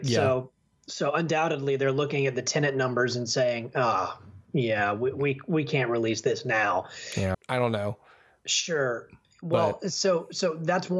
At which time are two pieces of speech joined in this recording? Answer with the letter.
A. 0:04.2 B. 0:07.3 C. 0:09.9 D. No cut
B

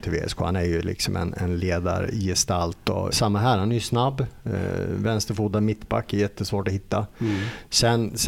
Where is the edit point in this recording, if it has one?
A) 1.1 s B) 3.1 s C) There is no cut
B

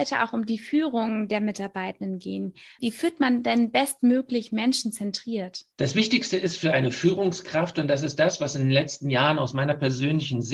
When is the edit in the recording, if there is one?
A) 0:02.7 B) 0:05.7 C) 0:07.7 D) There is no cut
B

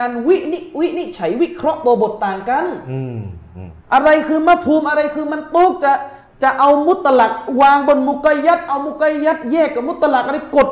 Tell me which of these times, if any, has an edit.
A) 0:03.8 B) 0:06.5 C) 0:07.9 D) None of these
A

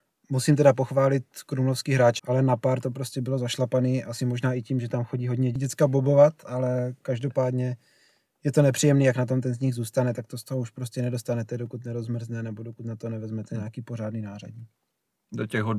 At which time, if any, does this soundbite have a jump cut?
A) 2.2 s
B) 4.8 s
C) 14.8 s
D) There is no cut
A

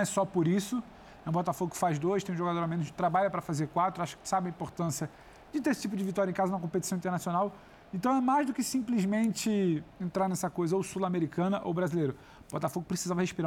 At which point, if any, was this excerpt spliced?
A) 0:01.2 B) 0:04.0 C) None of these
C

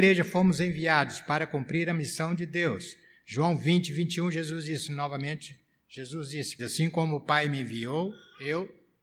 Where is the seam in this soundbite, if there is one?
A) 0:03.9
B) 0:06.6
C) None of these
B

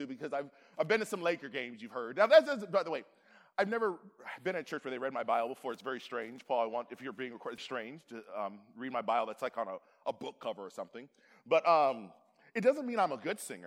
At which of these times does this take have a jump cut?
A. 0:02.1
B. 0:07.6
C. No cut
B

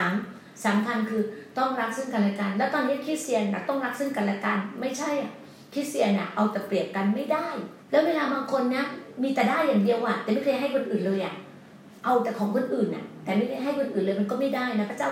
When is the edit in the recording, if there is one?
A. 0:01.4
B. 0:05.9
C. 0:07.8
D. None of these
C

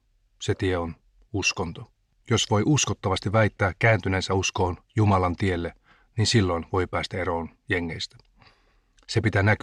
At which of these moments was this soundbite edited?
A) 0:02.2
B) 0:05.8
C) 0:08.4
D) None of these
A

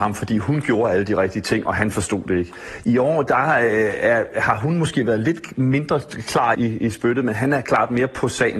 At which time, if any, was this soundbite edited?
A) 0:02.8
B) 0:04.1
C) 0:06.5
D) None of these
C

